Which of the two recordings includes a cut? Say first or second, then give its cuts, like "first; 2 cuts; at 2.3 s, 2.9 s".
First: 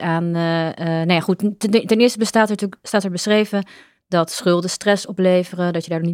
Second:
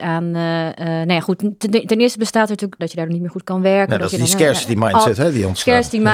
second; 1 cut; at 2.8 s